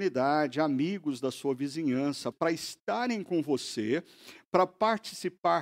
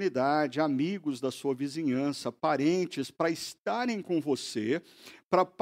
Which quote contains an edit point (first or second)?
first